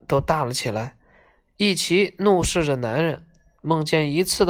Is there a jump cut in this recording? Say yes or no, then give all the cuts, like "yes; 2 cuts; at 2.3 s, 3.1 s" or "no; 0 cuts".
yes; 1 cut; at 3.6 s